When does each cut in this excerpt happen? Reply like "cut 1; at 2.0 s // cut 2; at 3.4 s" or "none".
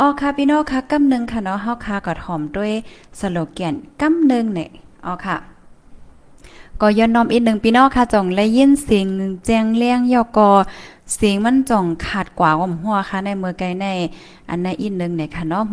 cut 1; at 5.0 s